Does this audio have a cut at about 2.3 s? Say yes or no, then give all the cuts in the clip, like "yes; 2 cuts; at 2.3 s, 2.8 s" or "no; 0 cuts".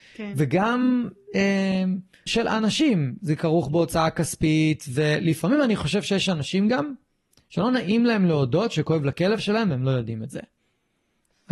yes; 1 cut; at 2.3 s